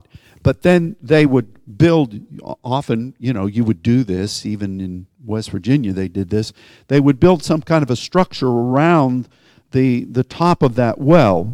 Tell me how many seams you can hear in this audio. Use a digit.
0